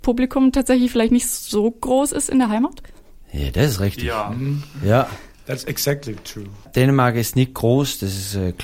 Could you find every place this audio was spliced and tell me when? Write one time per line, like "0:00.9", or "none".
none